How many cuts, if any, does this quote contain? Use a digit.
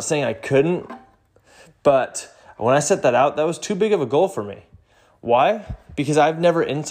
0